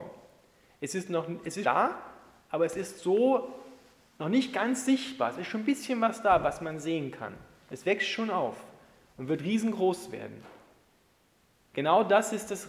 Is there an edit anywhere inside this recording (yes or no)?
yes